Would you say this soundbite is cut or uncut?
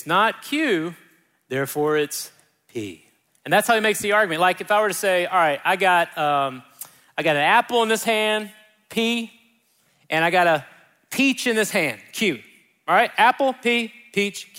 uncut